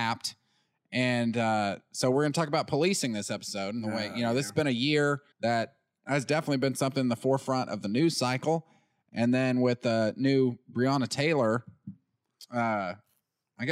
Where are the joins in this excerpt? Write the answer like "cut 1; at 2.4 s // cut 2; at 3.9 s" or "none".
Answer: cut 1; at 5.3 s